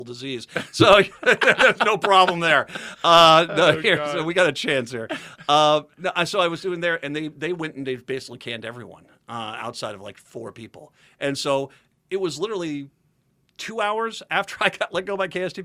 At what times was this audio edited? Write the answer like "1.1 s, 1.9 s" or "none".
none

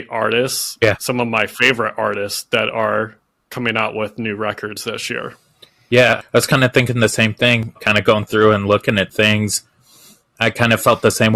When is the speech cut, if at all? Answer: 6.2 s, 7.8 s

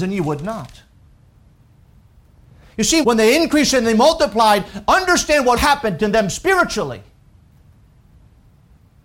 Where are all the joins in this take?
3.0 s, 5.6 s

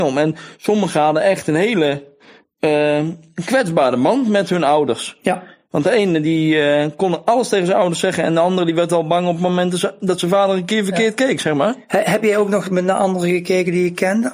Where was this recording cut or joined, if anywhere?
none

